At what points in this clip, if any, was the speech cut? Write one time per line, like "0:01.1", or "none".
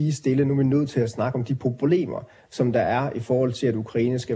none